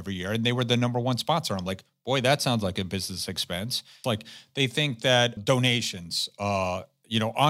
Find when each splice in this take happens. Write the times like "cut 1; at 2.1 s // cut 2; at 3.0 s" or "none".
cut 1; at 4.0 s // cut 2; at 5.4 s